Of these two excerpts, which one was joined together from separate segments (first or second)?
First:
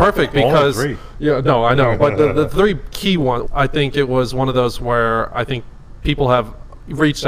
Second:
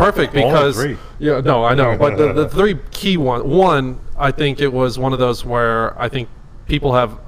first